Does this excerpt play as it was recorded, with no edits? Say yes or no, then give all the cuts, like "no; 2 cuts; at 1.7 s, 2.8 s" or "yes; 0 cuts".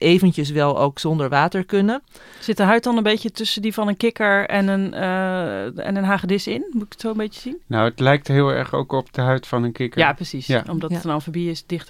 yes; 0 cuts